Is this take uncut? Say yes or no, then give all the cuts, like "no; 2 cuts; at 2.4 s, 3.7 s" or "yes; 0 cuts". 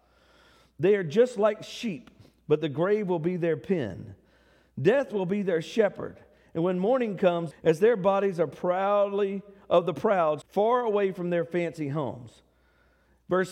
no; 2 cuts; at 7.5 s, 10.4 s